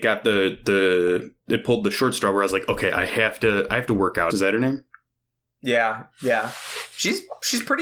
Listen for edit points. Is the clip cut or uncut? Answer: cut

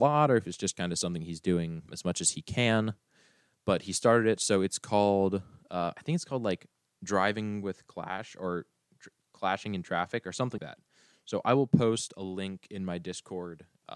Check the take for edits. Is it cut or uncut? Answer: cut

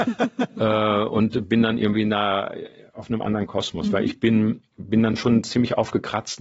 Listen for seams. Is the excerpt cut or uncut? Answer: uncut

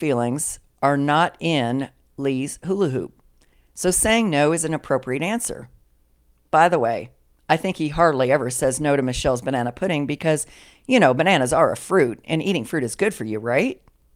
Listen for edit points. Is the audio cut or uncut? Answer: uncut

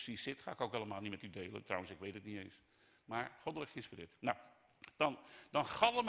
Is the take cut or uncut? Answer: uncut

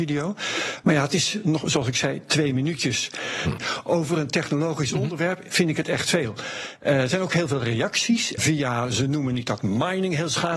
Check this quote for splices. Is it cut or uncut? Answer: cut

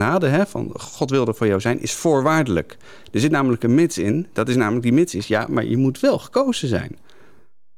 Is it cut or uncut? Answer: uncut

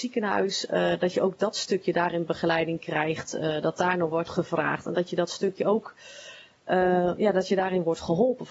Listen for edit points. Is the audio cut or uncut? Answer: uncut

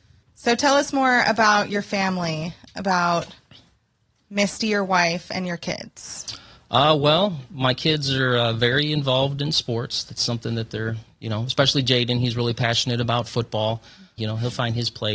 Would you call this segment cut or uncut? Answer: cut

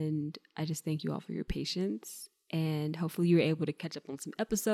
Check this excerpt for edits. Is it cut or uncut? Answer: uncut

